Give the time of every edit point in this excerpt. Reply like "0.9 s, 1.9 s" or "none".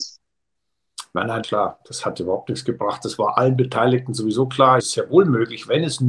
1.4 s, 4.8 s